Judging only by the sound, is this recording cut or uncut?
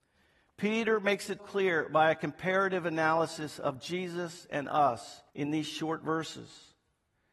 cut